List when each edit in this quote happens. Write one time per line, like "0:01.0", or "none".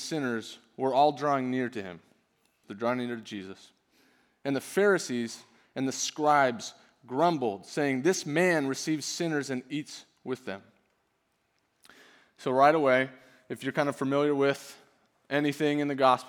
0:02.6